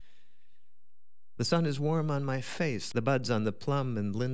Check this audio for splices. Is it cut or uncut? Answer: cut